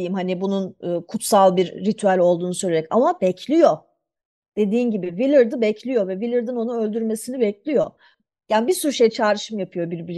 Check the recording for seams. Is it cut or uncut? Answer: uncut